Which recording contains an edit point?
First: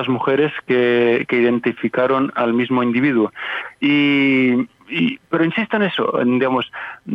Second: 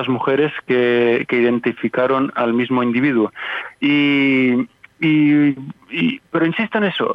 first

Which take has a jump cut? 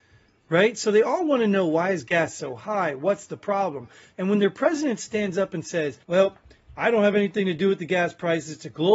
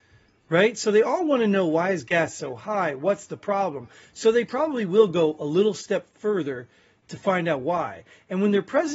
first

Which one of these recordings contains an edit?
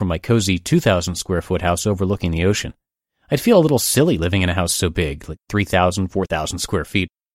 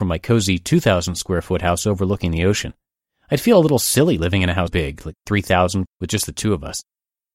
second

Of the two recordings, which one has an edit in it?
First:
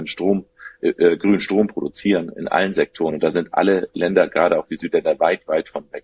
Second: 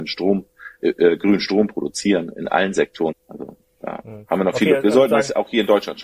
second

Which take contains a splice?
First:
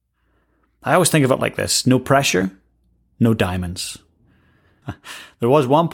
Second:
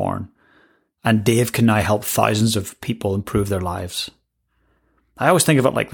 first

